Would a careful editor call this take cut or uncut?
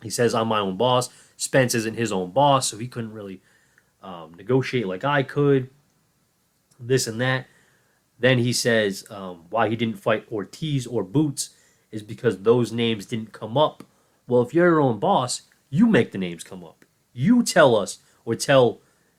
uncut